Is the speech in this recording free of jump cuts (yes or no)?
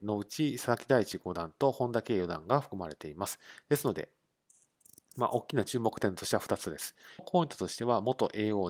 yes